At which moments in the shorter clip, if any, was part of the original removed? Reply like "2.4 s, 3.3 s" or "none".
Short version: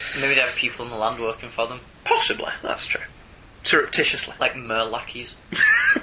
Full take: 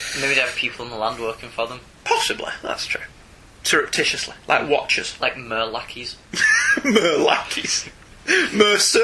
4.4 s